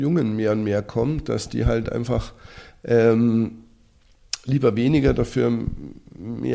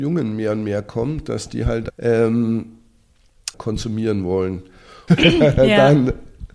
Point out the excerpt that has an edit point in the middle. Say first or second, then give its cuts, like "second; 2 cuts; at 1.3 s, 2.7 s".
second; 3 cuts; at 1.9 s, 3.5 s, 5.1 s